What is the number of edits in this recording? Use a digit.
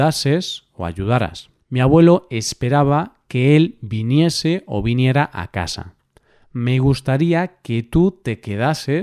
1